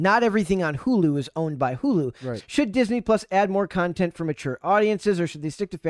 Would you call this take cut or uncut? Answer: cut